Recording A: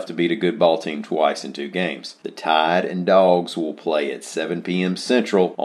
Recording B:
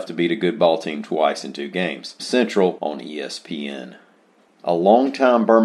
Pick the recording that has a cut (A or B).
B